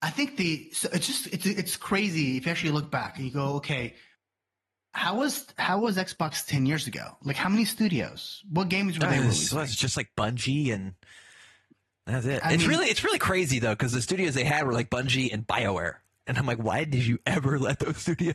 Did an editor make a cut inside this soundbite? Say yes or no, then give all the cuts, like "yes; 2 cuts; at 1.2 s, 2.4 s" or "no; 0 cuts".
no; 0 cuts